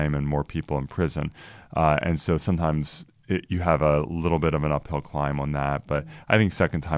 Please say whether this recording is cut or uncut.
uncut